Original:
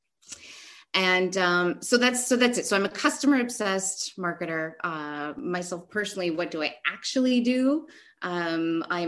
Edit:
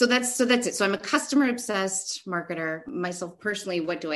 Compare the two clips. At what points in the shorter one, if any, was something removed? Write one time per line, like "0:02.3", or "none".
0:02.8